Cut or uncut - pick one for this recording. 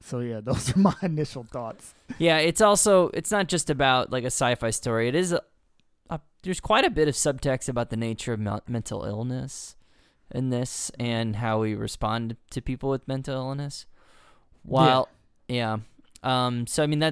uncut